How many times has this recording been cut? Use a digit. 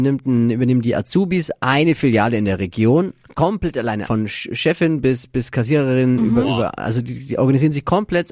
1